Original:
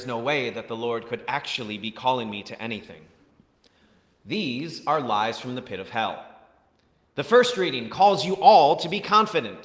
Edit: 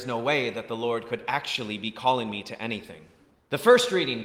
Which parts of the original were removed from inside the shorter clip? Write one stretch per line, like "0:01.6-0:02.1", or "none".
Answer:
0:03.3-0:07.0